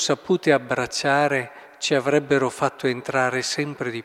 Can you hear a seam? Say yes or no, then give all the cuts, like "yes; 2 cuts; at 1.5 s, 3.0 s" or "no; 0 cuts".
no; 0 cuts